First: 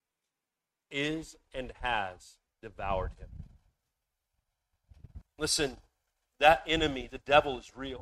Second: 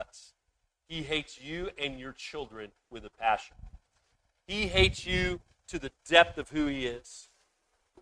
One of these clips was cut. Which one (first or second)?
first